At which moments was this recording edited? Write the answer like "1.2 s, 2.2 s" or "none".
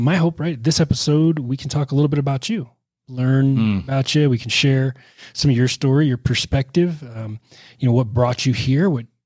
none